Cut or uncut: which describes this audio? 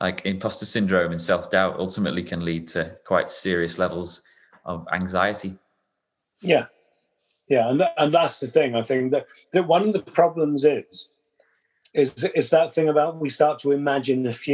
uncut